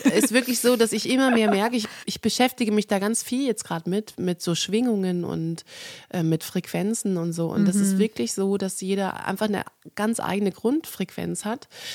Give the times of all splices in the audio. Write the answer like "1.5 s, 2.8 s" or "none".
none